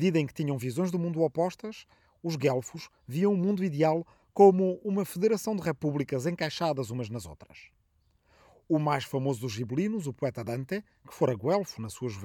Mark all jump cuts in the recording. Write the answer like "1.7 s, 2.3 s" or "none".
none